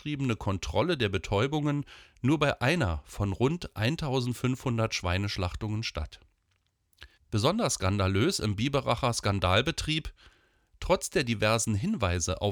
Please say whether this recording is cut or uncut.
cut